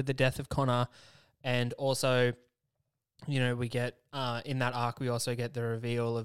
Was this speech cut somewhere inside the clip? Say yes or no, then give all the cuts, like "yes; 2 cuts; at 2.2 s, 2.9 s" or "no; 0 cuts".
no; 0 cuts